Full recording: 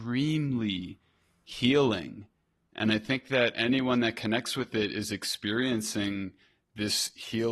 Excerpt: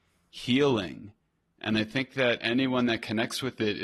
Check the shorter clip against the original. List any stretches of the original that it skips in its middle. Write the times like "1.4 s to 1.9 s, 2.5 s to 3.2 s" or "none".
none